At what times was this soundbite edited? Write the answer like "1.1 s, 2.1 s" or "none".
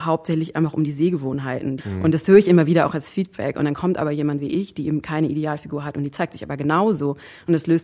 1.8 s